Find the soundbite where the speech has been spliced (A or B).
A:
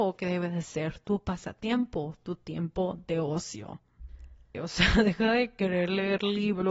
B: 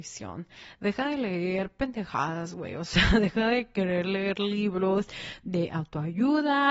A